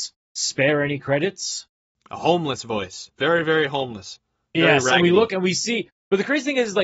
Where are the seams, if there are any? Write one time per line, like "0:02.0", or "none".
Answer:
none